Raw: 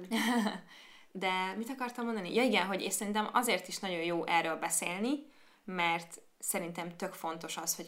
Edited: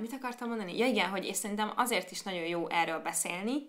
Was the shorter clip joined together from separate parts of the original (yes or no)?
no